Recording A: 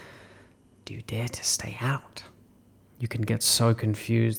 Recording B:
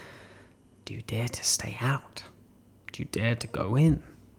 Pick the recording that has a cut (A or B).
A